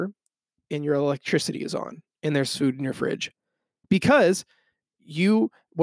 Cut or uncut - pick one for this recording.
uncut